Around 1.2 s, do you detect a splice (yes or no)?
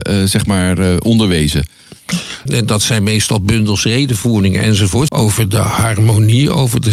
no